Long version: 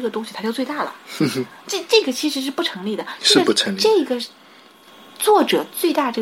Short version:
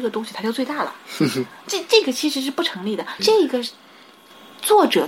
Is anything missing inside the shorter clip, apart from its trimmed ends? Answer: yes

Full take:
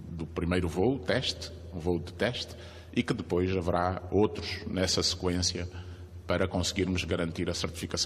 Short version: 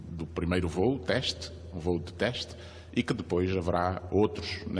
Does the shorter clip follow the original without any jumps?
yes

